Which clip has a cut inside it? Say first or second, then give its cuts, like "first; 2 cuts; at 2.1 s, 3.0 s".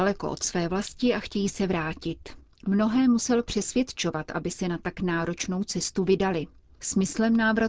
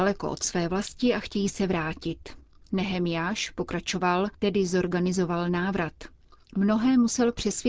first; 1 cut; at 2.5 s